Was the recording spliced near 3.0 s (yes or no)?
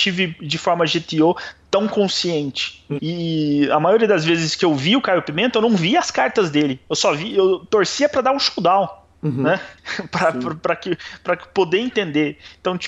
yes